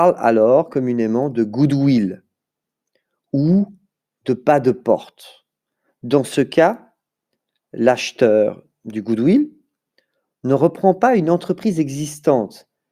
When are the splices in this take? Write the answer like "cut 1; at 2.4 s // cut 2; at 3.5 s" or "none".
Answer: none